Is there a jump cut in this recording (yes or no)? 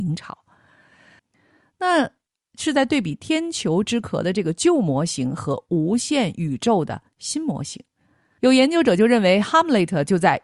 yes